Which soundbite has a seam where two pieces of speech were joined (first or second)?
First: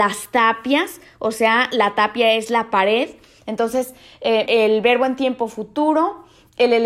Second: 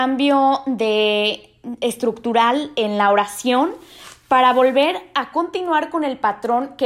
first